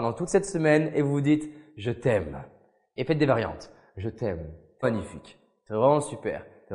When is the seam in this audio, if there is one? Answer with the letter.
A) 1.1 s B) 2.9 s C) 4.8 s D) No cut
C